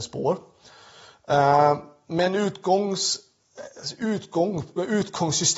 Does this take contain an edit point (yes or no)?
no